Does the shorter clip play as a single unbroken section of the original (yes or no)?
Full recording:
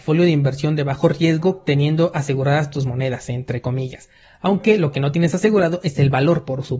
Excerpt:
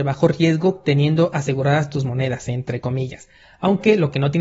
yes